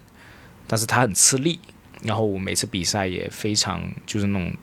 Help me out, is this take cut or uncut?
uncut